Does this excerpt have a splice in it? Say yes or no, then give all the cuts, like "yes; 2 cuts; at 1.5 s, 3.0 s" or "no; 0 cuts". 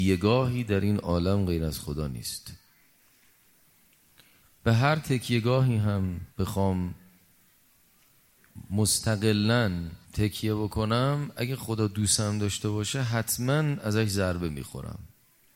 yes; 2 cuts; at 6.3 s, 10.0 s